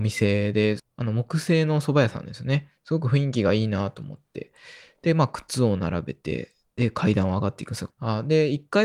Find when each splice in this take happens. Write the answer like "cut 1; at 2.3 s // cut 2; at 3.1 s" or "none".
cut 1; at 7.9 s